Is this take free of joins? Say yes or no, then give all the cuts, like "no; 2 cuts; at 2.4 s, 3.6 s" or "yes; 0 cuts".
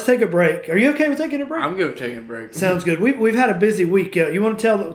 yes; 0 cuts